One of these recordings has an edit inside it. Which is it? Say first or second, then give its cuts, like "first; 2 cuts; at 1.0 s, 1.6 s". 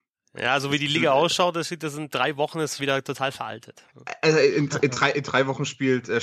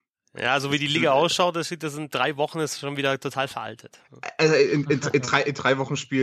first; 2 cuts; at 2.8 s, 4.7 s